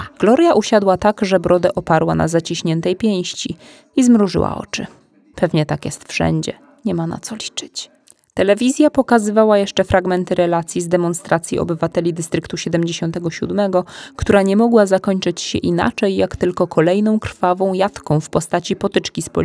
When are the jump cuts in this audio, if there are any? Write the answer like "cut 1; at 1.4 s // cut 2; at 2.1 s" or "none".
none